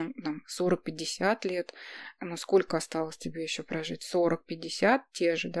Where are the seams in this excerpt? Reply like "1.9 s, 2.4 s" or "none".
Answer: none